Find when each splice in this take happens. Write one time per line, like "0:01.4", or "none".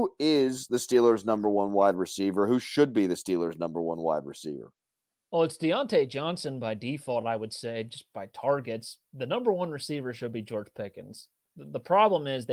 none